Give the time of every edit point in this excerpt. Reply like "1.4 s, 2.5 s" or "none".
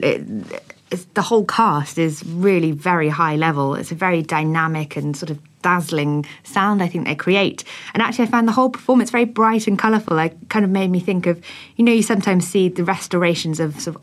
none